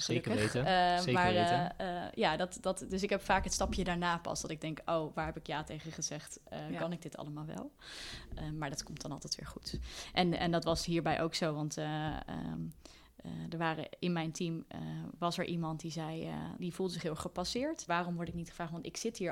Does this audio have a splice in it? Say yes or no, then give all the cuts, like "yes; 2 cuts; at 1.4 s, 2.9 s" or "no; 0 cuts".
yes; 2 cuts; at 16.6 s, 17.9 s